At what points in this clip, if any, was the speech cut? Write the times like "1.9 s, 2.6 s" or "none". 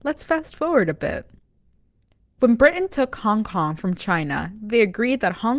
none